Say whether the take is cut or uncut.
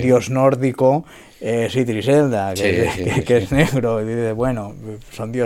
uncut